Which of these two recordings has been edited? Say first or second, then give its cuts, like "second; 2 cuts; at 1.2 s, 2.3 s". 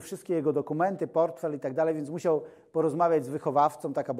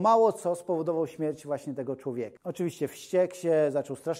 second; 1 cut; at 2.4 s